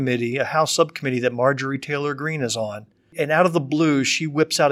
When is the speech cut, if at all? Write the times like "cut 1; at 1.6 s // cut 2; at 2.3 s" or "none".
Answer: none